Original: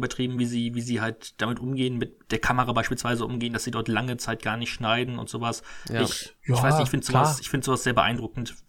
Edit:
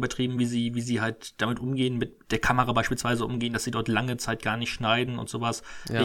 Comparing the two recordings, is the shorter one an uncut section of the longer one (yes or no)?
yes